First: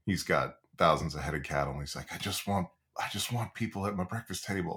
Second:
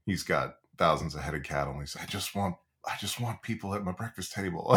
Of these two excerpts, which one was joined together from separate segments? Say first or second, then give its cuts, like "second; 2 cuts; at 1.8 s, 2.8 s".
second; 1 cut; at 1.9 s